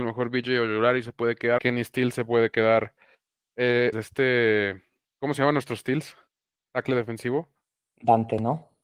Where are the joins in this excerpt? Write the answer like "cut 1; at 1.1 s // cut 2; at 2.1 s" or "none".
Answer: cut 1; at 1.6 s // cut 2; at 3.9 s